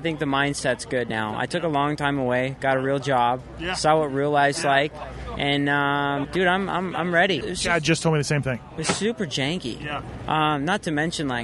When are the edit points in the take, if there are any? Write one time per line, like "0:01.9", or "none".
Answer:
0:06.2
0:07.4

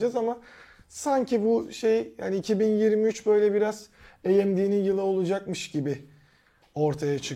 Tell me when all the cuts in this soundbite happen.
none

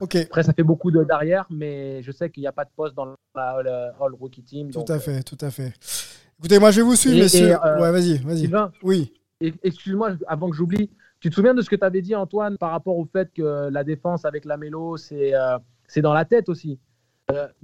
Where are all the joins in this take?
0:12.6

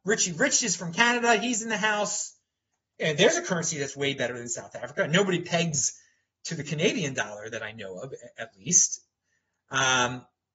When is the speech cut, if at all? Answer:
none

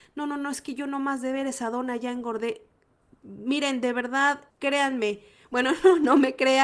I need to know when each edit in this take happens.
0:04.5

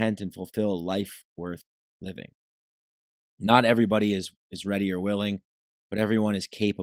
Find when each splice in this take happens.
none

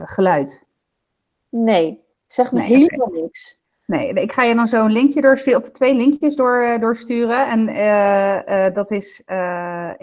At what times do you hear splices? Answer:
none

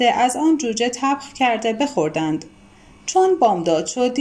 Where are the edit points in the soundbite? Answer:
0:02.9

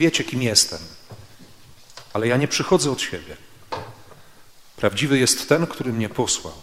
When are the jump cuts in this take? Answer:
none

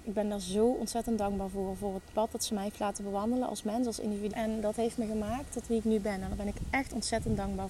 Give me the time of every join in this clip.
0:04.3

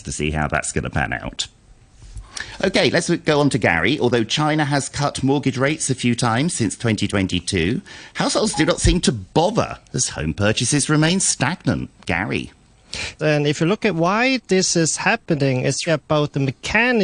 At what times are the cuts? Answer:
0:13.2
0:15.9

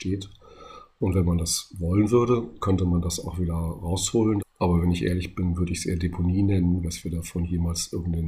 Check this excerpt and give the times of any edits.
0:04.4
0:06.8

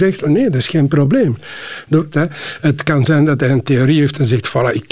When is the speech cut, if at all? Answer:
0:02.1

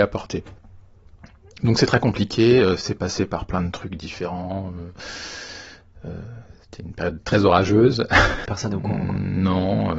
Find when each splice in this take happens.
0:08.4

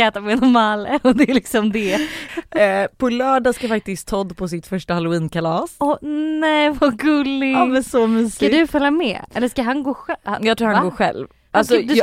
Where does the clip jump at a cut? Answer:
0:02.3

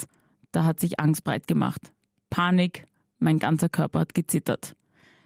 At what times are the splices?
none

